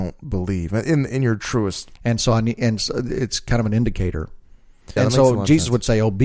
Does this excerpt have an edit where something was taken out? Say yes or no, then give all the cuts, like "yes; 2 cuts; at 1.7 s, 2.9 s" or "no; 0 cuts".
yes; 2 cuts; at 2.0 s, 5.0 s